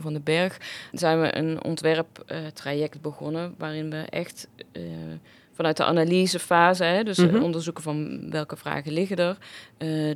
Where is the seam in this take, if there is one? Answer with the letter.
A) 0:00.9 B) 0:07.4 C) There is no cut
A